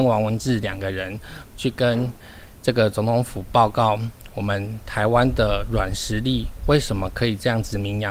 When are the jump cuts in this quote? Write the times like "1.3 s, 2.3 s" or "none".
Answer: 1.4 s